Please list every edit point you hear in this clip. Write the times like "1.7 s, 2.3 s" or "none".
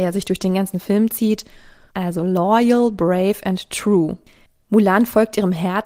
1.9 s